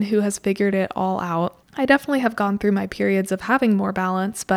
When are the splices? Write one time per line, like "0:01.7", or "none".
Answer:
0:01.6